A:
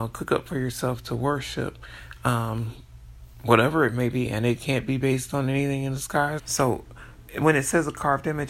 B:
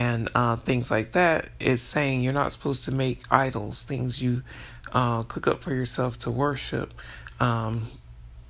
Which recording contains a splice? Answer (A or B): A